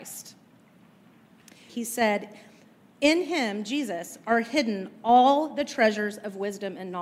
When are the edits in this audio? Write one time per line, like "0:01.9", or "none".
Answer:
0:01.7